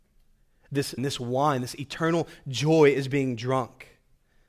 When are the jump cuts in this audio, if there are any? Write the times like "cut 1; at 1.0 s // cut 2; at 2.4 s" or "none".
cut 1; at 1.0 s